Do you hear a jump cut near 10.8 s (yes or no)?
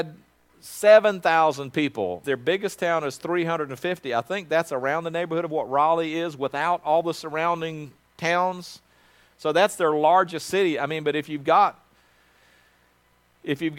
no